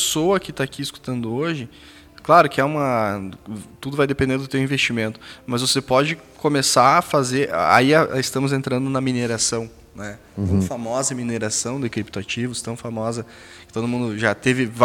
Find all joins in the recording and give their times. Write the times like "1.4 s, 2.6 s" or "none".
none